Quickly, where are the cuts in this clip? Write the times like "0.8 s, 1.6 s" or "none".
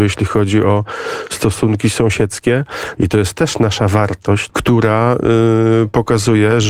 3.0 s, 4.5 s